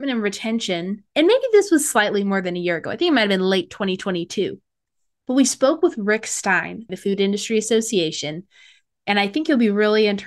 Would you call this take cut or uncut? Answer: cut